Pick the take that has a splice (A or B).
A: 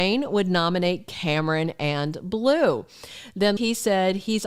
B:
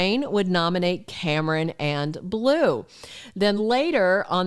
A